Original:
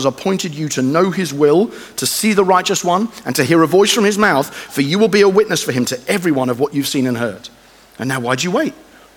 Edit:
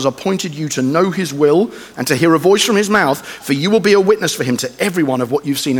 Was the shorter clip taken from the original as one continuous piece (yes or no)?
no